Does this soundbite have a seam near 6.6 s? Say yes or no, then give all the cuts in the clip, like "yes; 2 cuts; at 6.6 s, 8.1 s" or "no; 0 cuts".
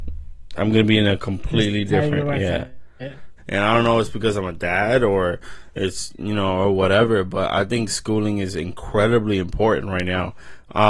no; 1 cut; at 3.4 s